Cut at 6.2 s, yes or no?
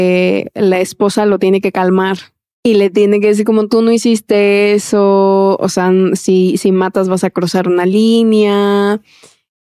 no